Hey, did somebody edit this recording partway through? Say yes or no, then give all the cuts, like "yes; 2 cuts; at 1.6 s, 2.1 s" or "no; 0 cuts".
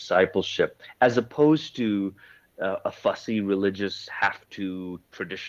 no; 0 cuts